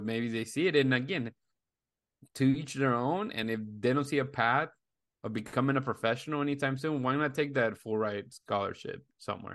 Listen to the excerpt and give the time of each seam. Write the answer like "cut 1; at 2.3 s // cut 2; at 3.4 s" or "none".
none